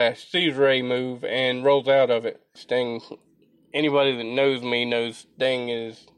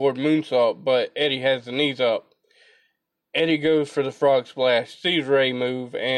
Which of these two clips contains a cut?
first; 1 cut; at 2.6 s

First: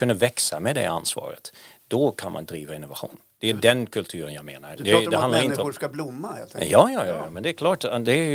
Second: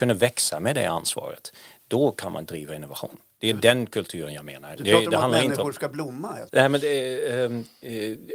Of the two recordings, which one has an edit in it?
second; 1 cut; at 6.5 s

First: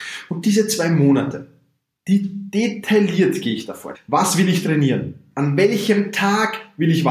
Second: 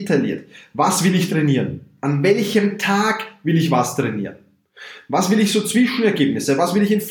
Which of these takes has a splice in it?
first; 1 cut; at 3.9 s

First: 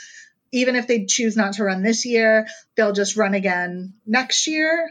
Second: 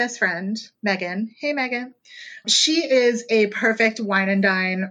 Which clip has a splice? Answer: second; 1 cut; at 2.4 s

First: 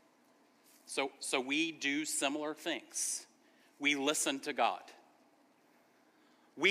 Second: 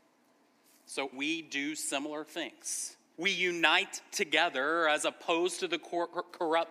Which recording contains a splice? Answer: second; 2 cuts; at 1.1 s, 3.1 s

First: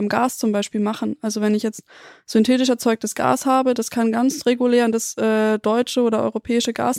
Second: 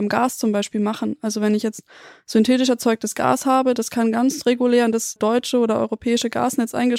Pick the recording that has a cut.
second; 1 cut; at 5.2 s

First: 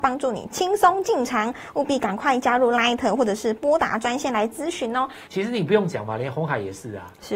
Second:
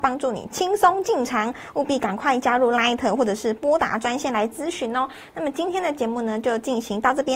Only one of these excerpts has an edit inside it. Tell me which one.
first; 1 cut; at 5.3 s

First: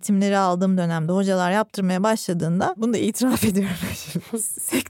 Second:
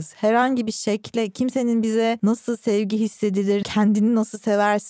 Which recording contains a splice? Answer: second; 1 cut; at 3.6 s

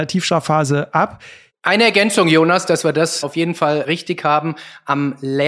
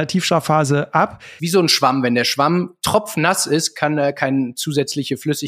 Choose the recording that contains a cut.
second; 1 cut; at 1.4 s

